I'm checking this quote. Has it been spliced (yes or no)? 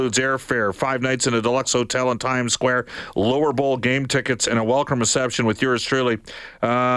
no